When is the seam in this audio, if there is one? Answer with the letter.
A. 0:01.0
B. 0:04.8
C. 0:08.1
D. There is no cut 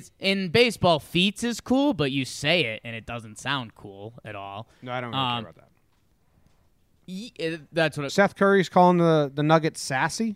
C